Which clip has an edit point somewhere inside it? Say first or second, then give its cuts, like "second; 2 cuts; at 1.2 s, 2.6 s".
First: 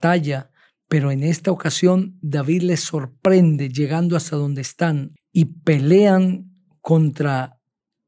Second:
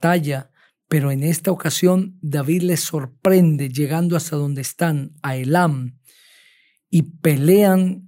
first; 1 cut; at 5.2 s